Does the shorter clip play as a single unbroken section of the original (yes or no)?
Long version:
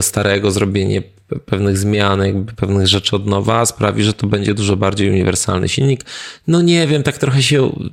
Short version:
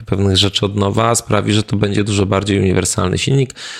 yes